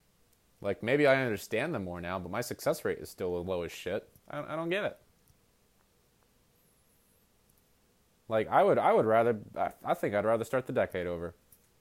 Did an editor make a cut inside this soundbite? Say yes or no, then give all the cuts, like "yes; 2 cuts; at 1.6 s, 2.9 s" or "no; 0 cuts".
no; 0 cuts